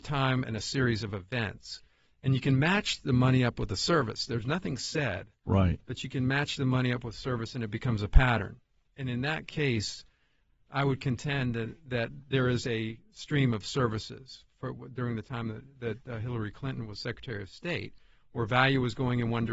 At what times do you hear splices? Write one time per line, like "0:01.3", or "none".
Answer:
none